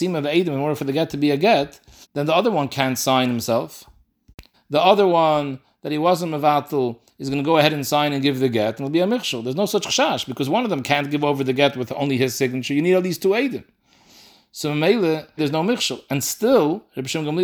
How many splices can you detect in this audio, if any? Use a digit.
3